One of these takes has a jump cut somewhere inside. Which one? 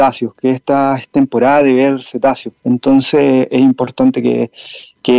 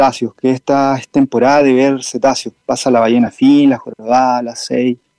first; 1 cut; at 2.6 s

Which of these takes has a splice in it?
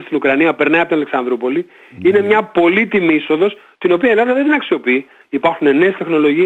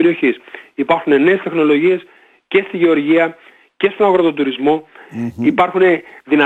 first; 1 cut; at 5.2 s

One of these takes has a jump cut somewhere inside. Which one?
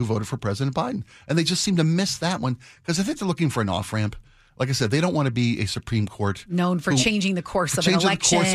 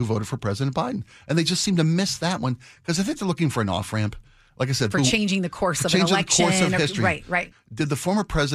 second; 2 cuts; at 4.9 s, 7.5 s

